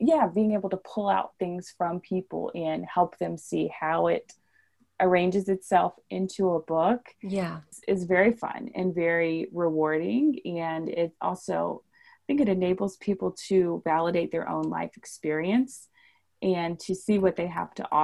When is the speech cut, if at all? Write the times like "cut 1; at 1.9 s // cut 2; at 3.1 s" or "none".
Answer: none